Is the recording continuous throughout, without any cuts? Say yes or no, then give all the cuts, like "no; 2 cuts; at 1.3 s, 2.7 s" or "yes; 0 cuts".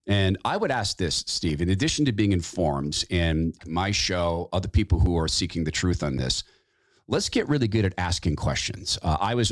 no; 1 cut; at 3.6 s